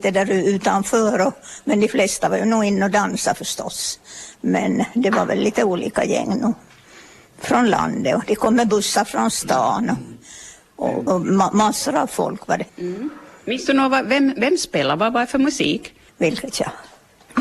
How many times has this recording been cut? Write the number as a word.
three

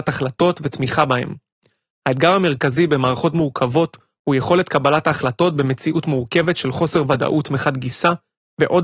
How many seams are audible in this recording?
zero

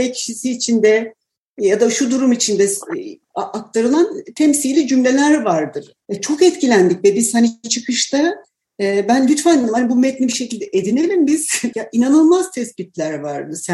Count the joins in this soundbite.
two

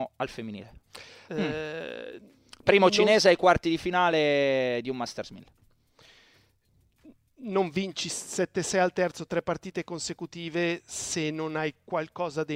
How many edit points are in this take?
one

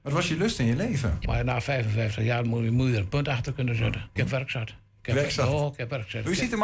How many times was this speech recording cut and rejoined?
two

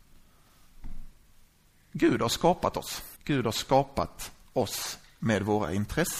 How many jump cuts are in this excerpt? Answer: one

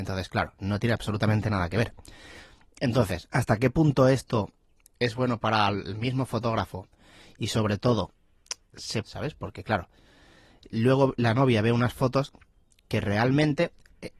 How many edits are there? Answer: two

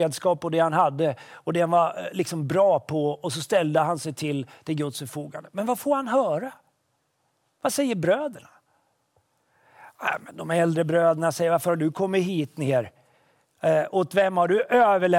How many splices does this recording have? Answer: zero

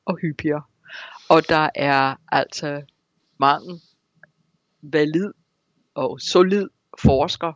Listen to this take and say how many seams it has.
zero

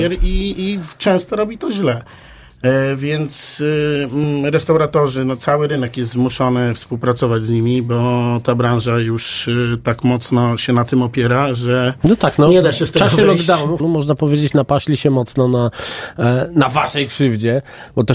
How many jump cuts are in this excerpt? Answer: one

